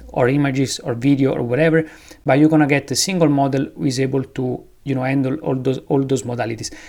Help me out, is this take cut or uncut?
uncut